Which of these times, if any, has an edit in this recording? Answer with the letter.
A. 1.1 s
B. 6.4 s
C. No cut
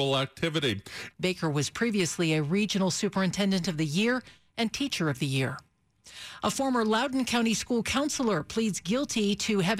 A